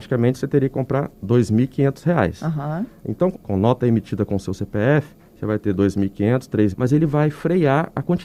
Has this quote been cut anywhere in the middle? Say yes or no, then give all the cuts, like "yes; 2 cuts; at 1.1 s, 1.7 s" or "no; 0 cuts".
yes; 3 cuts; at 3.3 s, 5.2 s, 6.7 s